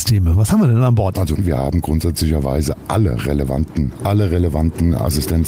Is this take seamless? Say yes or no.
no